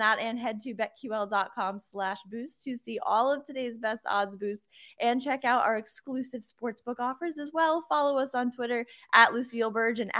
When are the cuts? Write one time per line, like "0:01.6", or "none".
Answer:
none